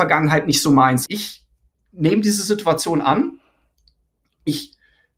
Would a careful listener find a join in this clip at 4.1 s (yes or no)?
no